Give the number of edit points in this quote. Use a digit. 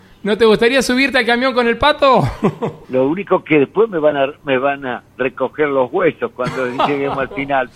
2